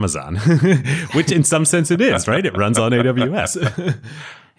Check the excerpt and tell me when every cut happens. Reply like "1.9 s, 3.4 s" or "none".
none